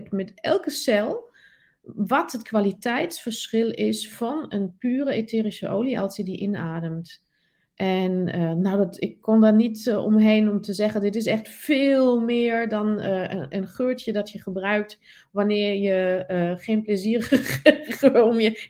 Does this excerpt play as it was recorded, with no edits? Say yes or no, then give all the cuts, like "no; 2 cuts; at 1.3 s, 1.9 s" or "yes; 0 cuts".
yes; 0 cuts